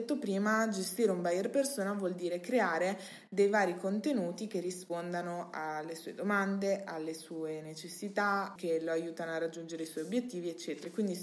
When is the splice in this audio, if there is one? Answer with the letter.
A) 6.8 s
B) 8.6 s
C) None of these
B